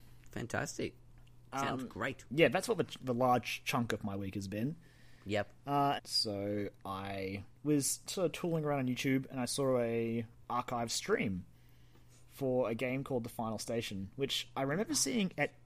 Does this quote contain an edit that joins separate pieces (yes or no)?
yes